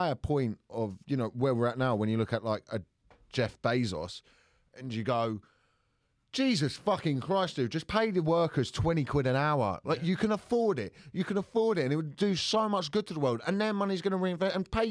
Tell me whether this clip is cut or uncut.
uncut